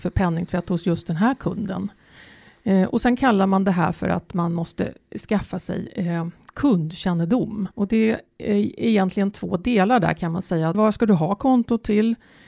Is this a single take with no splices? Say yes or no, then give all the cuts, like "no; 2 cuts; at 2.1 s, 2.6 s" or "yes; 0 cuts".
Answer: no; 2 cuts; at 7.7 s, 10.7 s